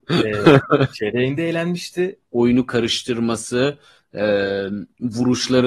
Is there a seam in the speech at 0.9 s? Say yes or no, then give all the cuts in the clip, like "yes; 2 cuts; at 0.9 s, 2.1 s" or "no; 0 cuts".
yes; 2 cuts; at 0.9 s, 2.2 s